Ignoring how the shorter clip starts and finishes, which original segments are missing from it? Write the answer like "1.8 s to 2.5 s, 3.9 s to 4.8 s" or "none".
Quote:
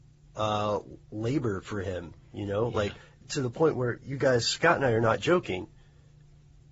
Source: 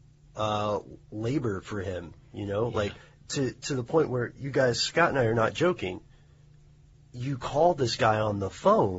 3.2 s to 3.5 s